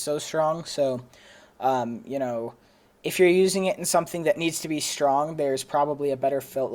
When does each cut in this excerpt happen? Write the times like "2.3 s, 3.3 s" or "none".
none

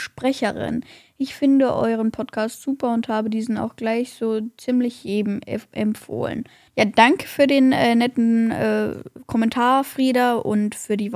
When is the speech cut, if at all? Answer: 6.7 s

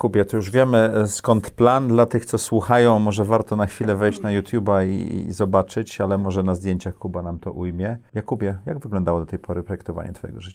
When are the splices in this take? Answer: none

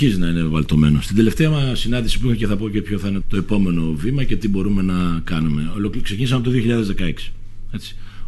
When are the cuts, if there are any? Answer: 3.2 s

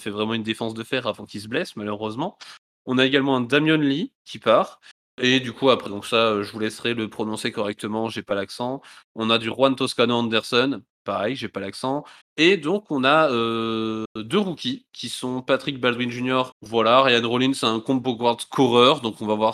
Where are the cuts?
5.9 s, 12.2 s, 16.5 s

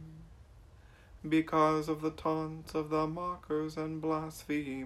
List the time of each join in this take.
1.2 s

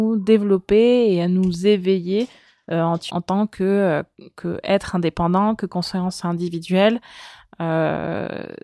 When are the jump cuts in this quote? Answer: 3.1 s

